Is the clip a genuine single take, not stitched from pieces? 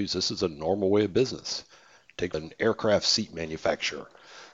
no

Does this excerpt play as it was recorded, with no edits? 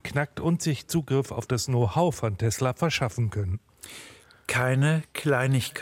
yes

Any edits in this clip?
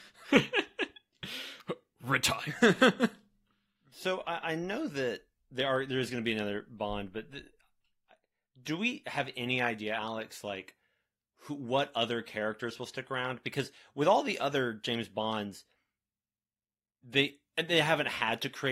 no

